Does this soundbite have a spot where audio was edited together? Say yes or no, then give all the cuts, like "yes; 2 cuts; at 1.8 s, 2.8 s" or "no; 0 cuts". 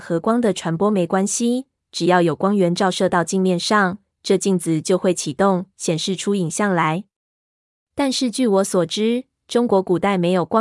no; 0 cuts